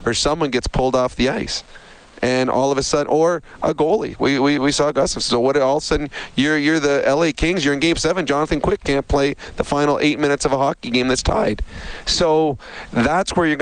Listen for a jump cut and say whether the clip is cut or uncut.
uncut